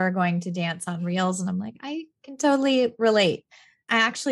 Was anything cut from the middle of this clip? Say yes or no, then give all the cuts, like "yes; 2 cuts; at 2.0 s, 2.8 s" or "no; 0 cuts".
no; 0 cuts